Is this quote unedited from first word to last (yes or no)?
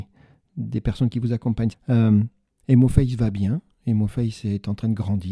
no